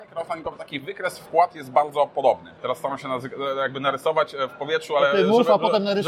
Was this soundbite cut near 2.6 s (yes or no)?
yes